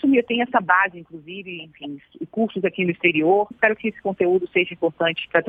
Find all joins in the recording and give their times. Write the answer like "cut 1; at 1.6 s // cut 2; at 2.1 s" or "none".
cut 1; at 3.5 s